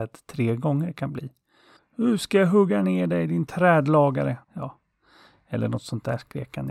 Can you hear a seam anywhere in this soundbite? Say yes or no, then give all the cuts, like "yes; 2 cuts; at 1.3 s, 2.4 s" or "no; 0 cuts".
yes; 2 cuts; at 1.8 s, 4.4 s